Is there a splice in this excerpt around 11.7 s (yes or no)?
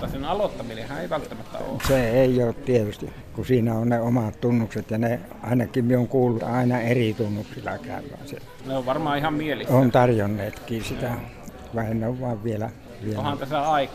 no